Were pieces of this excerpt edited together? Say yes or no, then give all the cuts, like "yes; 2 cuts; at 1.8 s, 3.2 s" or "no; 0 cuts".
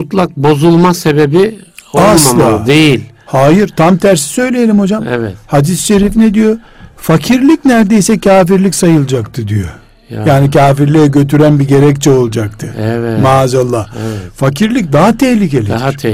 no; 0 cuts